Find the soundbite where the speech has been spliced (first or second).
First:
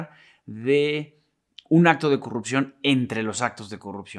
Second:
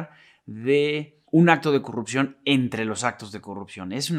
second